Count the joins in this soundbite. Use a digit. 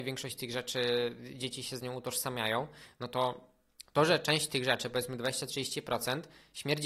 0